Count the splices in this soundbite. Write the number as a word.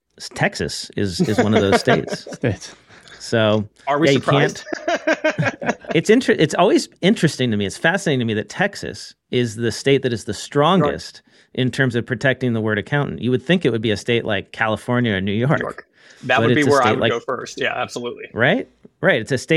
zero